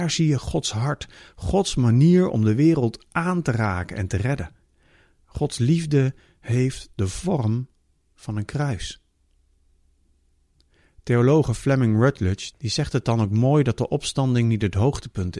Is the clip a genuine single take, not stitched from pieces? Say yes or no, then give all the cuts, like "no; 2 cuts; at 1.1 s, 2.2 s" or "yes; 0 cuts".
no; 1 cut; at 12.5 s